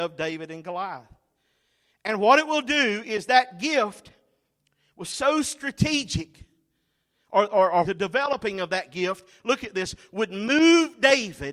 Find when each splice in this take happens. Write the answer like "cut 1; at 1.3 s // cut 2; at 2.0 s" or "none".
cut 1; at 7.8 s